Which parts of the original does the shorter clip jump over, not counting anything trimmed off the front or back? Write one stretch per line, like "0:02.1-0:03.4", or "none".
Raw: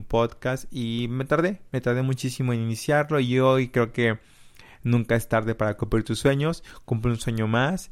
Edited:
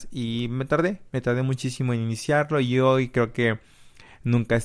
none